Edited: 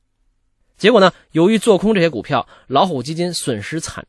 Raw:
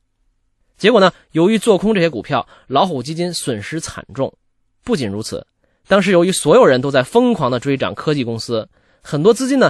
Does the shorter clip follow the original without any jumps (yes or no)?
yes